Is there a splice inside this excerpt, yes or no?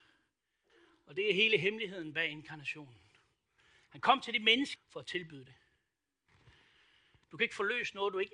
yes